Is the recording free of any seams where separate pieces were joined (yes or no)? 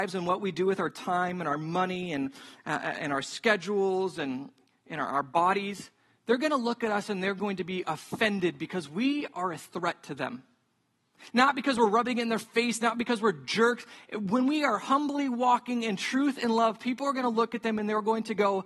yes